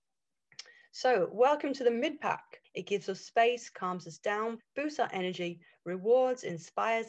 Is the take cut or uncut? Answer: cut